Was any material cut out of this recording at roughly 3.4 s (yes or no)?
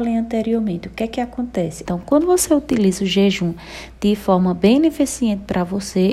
no